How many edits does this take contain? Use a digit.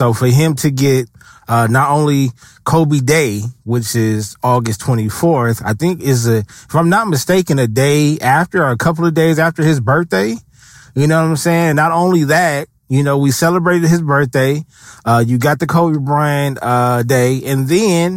0